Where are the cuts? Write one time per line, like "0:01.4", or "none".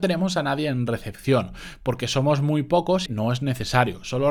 0:03.1